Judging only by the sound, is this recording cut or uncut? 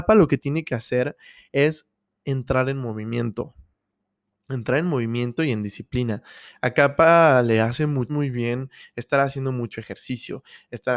cut